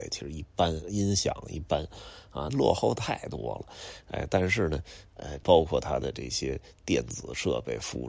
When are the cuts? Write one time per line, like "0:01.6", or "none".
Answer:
0:02.5
0:05.4